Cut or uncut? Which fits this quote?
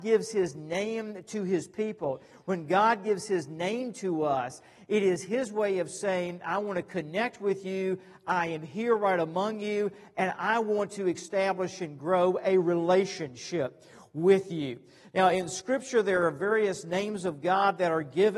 uncut